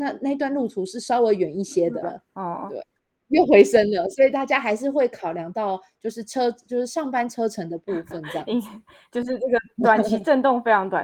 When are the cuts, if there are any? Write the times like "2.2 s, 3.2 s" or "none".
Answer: 2.0 s